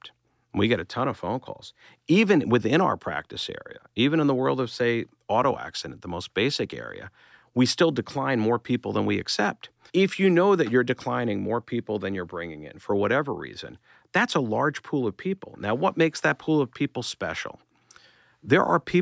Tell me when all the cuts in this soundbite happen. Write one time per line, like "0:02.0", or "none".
0:09.9